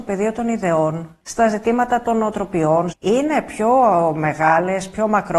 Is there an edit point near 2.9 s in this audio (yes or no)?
yes